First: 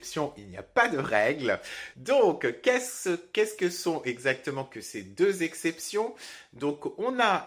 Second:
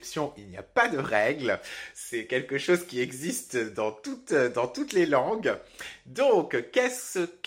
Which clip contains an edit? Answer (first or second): first